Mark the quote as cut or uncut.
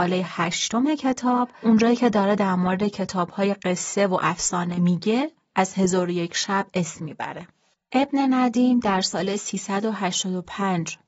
uncut